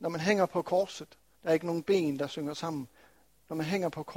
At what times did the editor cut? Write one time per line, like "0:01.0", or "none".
0:01.3